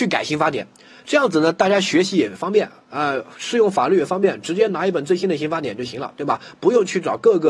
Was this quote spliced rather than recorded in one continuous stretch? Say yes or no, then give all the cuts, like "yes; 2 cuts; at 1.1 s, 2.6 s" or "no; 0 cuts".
no; 0 cuts